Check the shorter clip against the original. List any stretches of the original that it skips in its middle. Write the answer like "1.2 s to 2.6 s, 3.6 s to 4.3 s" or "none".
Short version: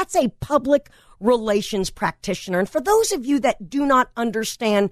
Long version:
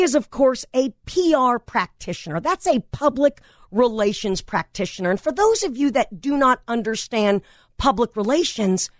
none